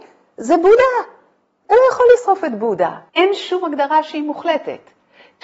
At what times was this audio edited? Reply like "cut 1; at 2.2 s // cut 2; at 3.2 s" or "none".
cut 1; at 3.1 s